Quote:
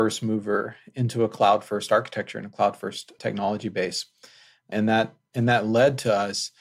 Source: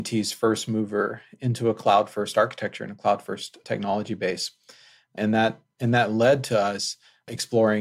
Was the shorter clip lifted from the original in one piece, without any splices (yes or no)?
yes